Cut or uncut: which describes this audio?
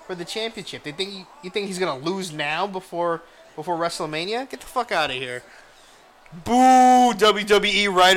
uncut